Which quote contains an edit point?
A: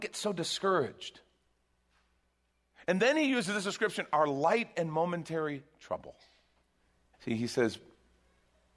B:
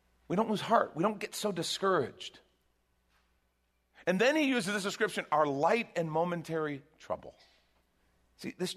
A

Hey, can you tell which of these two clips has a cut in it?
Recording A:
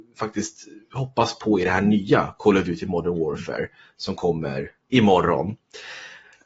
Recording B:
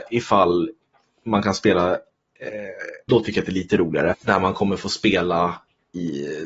B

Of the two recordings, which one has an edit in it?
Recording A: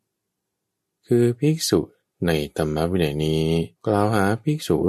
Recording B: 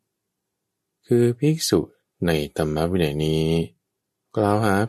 A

